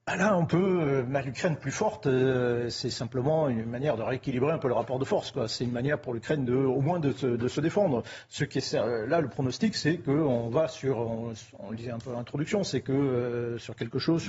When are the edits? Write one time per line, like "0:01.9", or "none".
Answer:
none